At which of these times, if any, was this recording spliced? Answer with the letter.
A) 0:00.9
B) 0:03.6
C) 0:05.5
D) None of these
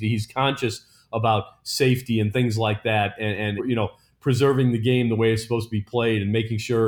B